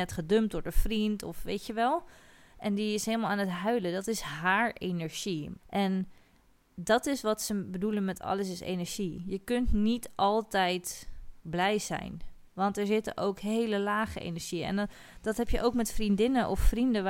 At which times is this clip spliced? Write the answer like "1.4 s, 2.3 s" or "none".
5.6 s, 12.5 s